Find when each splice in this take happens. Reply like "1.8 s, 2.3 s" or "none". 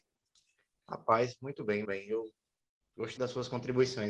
1.8 s, 3.2 s